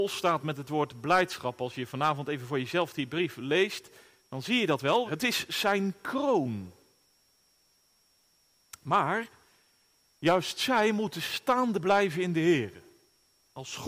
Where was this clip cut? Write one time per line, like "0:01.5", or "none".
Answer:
0:05.1